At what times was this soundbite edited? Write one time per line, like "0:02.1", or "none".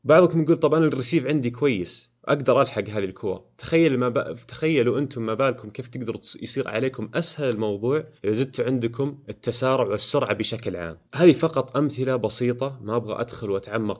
0:08.2
0:11.0